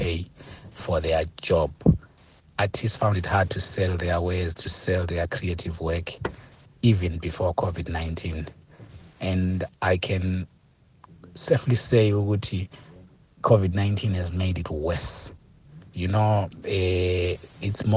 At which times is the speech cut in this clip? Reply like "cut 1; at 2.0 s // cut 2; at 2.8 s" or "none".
cut 1; at 15.9 s